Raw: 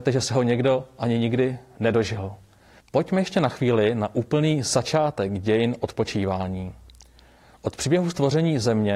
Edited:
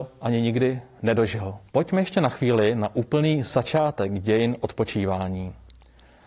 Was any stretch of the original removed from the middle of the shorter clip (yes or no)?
yes